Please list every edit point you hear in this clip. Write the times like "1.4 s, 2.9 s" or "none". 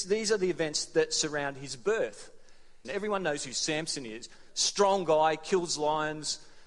2.8 s